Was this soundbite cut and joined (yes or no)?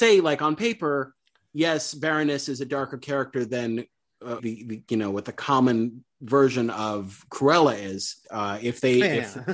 yes